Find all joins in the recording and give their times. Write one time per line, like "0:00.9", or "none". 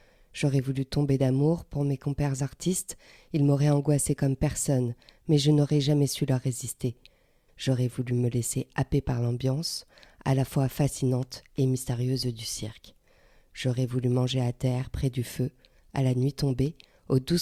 0:07.5